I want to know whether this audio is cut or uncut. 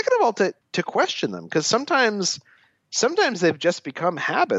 uncut